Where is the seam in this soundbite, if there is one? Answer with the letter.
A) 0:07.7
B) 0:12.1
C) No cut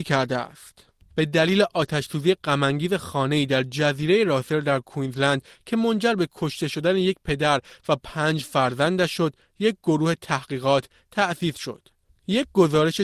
B